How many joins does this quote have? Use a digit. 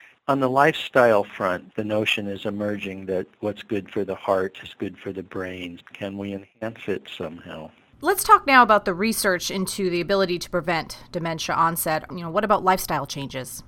2